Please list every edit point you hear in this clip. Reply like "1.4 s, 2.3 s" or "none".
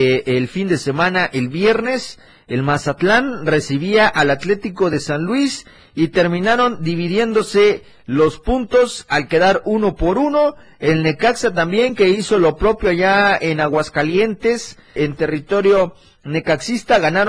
15.0 s